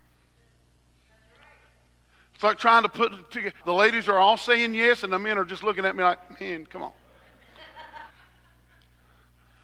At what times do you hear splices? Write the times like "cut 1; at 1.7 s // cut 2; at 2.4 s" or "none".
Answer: cut 1; at 3.6 s // cut 2; at 8.1 s